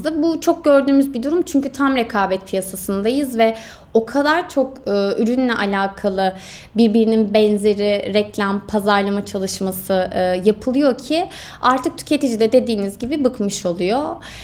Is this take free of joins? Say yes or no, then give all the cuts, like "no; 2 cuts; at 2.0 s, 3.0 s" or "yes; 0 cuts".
yes; 0 cuts